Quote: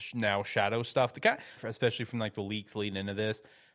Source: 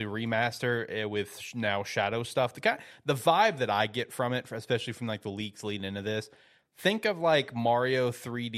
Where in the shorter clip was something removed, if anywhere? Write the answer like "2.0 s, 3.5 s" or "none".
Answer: 1.6 s